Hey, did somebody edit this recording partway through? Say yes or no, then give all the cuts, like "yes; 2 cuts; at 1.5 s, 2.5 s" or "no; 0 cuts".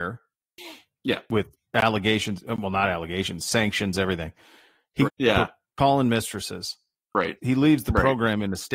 yes; 2 cuts; at 5.0 s, 7.4 s